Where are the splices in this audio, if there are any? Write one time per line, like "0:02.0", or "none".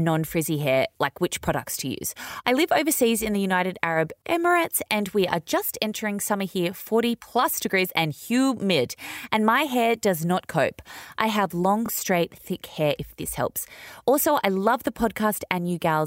none